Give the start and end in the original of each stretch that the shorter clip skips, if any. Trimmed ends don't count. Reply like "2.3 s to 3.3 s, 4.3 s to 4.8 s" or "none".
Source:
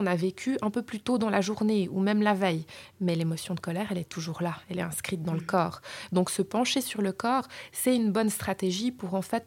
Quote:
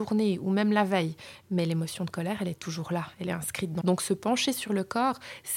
5.3 s to 6.1 s